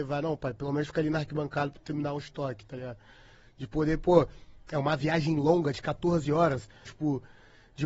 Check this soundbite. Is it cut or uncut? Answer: cut